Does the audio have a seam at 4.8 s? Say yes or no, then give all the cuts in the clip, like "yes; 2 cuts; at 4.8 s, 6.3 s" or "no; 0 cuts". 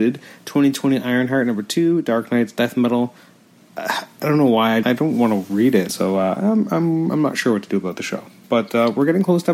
yes; 2 cuts; at 4.8 s, 5.9 s